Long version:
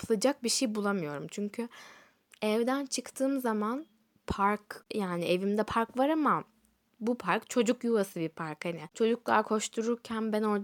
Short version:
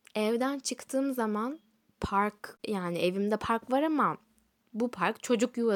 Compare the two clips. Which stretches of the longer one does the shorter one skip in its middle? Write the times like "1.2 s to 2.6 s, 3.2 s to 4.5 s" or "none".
none